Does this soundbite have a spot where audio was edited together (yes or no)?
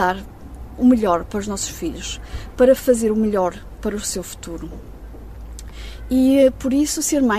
yes